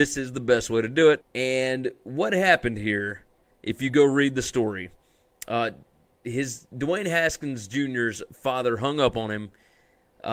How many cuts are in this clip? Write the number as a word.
one